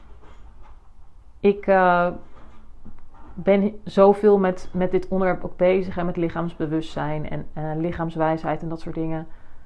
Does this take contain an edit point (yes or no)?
no